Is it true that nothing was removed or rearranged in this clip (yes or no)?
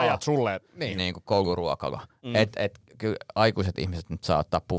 no